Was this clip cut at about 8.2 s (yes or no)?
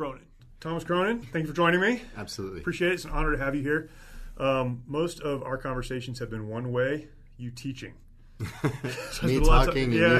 no